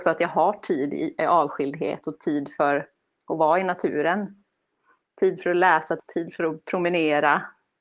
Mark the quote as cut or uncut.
cut